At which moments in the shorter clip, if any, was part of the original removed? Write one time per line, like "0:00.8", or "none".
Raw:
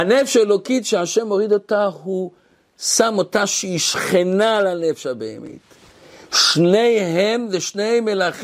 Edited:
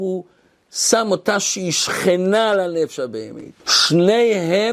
0:03.6